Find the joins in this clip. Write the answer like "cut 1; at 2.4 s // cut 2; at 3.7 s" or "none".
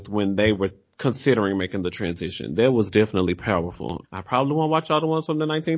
cut 1; at 4.0 s